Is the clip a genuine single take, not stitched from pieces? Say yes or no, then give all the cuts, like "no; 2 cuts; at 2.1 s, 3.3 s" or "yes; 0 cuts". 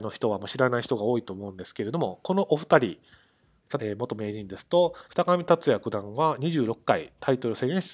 no; 2 cuts; at 3.8 s, 5.1 s